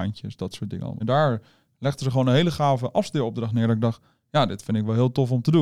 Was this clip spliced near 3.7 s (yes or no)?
no